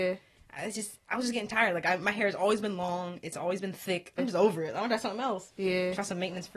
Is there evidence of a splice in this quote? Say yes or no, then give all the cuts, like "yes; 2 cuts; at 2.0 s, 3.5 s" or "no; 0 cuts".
yes; 1 cut; at 4.2 s